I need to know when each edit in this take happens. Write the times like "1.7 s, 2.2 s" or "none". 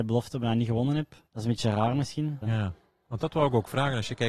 2.4 s

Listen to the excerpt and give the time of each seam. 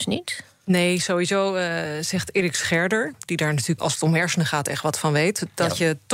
3.8 s

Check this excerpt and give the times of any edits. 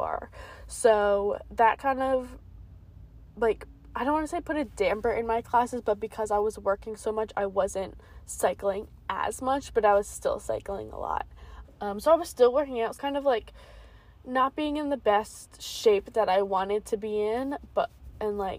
11.6 s, 13.0 s

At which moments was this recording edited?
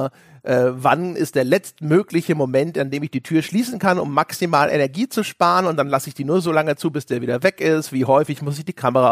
none

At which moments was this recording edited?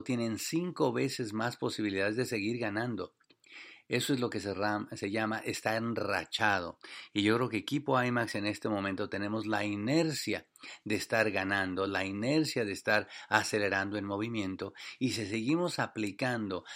none

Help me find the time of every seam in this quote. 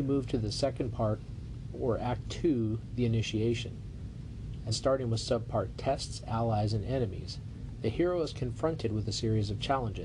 4.7 s

